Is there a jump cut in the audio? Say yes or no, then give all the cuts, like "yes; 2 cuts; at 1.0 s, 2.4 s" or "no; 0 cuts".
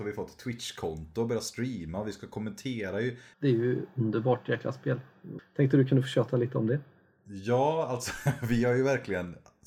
yes; 2 cuts; at 3.3 s, 5.4 s